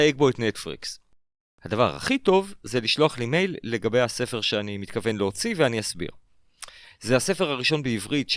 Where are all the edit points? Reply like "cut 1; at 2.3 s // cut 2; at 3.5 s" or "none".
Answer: cut 1; at 6.8 s